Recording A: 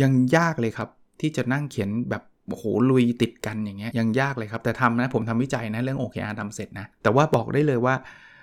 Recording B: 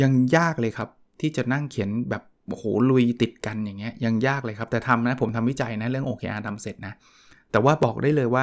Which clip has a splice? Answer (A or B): A